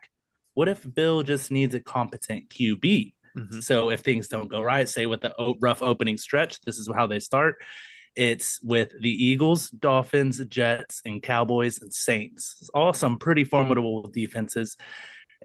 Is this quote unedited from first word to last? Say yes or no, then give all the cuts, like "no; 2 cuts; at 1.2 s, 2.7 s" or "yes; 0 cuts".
yes; 0 cuts